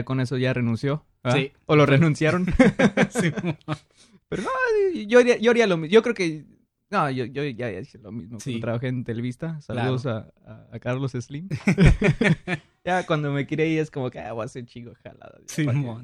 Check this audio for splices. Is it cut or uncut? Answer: uncut